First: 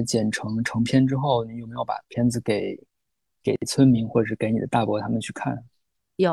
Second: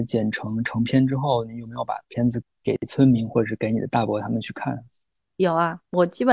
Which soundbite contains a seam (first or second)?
second